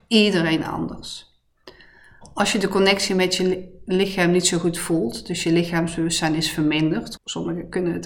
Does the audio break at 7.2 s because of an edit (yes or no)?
yes